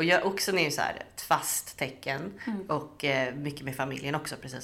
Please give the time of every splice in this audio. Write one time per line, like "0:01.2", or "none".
none